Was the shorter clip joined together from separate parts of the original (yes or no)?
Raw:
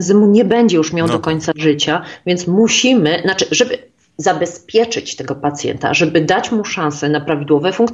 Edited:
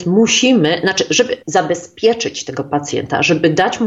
yes